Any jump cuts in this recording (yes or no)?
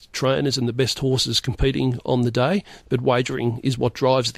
no